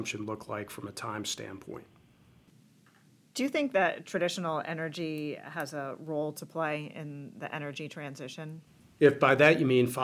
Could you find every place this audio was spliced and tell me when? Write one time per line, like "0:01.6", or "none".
none